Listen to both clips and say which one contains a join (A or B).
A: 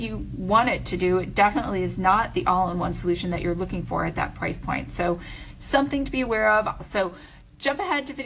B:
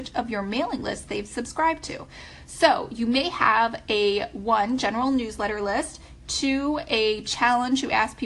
A